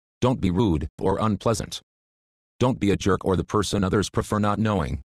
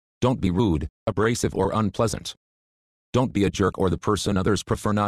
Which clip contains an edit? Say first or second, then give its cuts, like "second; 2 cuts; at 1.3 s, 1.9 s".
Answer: first; 1 cut; at 1.0 s